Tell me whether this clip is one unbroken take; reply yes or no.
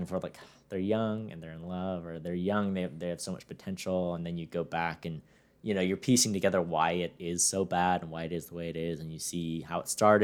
yes